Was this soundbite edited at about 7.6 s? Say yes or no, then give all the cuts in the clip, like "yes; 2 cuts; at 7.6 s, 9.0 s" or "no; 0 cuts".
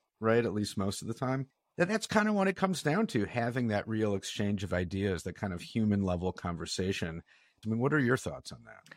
yes; 1 cut; at 7.6 s